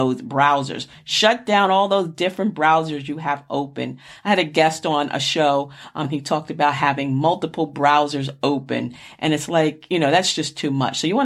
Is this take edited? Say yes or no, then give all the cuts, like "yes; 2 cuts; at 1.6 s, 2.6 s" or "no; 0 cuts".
yes; 1 cut; at 6.0 s